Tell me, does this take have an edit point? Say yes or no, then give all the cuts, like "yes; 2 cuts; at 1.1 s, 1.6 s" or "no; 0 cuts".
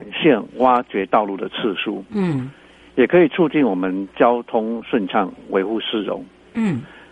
no; 0 cuts